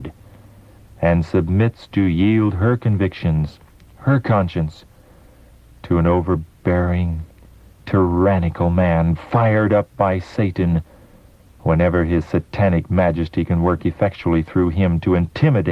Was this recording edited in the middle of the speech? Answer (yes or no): no